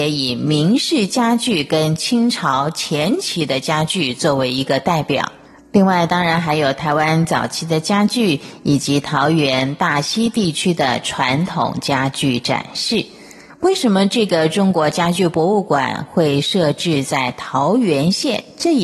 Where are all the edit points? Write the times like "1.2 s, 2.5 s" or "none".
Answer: none